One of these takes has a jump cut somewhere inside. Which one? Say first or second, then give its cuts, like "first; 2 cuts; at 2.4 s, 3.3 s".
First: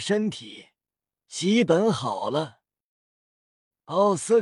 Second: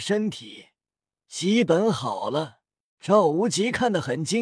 second; 1 cut; at 3.0 s